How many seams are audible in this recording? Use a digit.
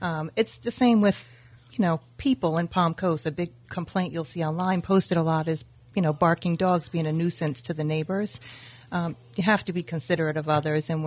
0